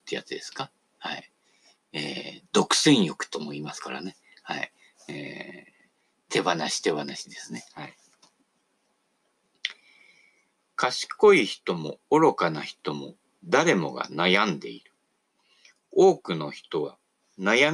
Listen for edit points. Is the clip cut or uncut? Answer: uncut